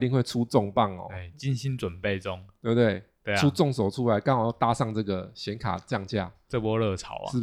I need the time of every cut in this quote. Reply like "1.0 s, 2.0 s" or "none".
none